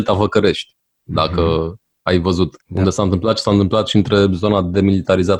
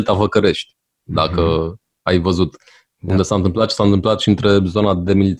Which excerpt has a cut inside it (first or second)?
first